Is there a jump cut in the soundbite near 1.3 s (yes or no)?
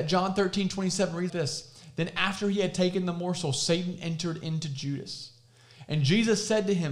yes